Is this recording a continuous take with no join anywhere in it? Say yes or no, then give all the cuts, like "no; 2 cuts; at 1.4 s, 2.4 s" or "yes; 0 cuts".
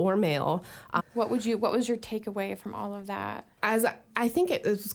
no; 2 cuts; at 1.0 s, 3.5 s